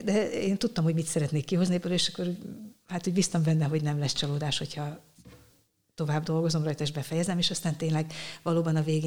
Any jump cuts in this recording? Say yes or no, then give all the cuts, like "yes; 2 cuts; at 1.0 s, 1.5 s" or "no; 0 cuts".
no; 0 cuts